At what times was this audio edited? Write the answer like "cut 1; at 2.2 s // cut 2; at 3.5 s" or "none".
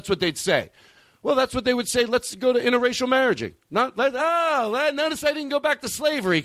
none